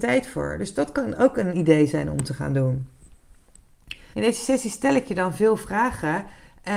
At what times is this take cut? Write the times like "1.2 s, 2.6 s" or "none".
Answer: 4.1 s